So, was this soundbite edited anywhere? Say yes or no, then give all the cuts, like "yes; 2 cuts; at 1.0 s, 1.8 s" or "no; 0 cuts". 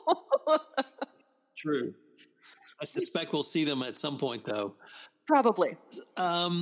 no; 0 cuts